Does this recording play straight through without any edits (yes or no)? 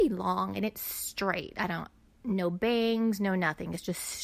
yes